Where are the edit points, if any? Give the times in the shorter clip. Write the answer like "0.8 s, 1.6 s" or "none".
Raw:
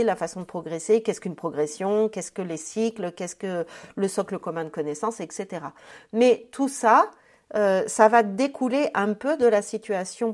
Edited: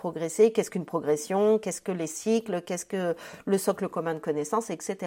none